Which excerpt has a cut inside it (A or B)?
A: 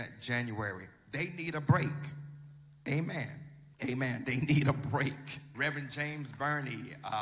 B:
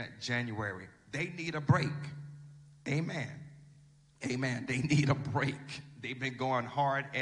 A